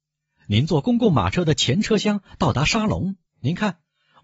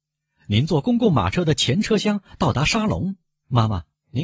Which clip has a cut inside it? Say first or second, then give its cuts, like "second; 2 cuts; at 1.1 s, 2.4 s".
first; 1 cut; at 3.3 s